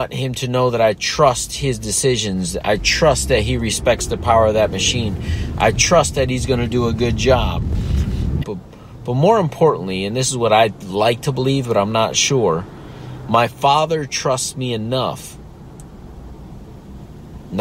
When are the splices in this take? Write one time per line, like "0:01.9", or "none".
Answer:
0:08.4